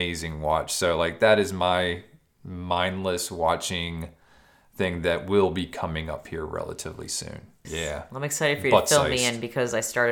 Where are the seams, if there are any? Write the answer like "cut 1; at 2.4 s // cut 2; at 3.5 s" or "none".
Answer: cut 1; at 7.6 s